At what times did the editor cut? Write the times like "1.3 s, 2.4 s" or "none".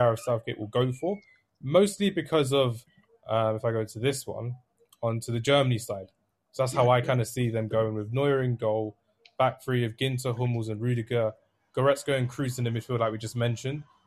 none